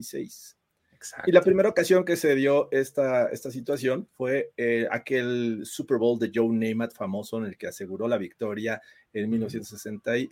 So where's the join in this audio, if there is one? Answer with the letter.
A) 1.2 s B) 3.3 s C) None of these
C